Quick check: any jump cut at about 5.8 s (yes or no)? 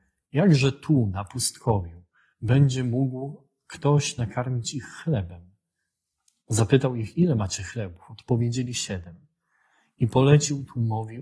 no